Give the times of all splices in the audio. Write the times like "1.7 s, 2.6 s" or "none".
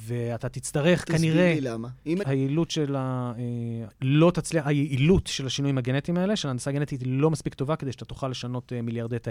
2.2 s, 3.9 s